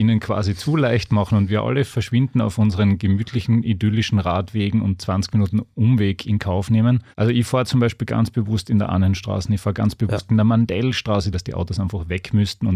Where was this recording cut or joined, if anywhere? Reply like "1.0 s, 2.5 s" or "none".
7.1 s, 11.3 s